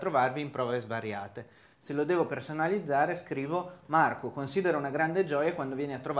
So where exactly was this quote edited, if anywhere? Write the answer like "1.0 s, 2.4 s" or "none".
none